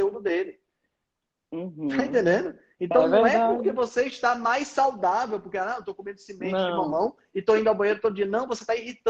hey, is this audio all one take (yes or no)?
yes